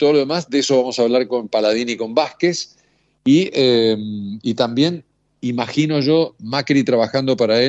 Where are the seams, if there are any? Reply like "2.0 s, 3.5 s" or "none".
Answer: none